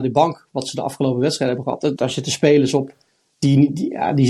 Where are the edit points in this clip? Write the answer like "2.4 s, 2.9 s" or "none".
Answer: 2.0 s